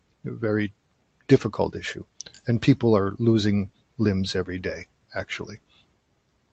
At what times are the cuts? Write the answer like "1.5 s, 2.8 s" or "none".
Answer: none